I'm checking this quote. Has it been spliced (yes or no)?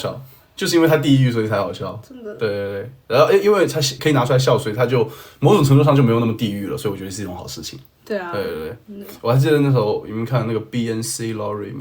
yes